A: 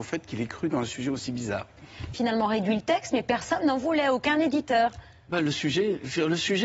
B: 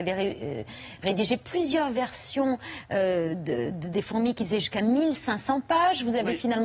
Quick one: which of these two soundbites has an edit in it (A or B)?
A